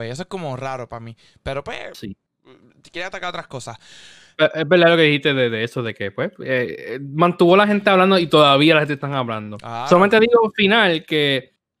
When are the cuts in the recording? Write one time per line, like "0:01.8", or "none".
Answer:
none